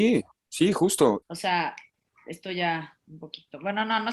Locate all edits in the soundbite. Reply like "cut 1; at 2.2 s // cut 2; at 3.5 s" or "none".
cut 1; at 1.2 s